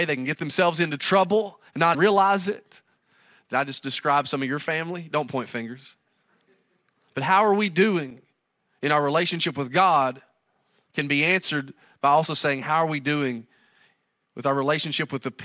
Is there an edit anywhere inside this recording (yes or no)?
yes